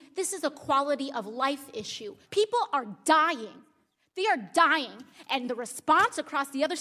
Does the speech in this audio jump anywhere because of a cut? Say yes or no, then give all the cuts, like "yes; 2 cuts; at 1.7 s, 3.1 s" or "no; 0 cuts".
yes; 1 cut; at 2.2 s